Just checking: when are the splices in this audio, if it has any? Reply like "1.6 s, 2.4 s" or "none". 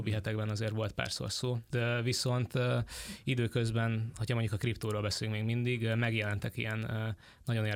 1.7 s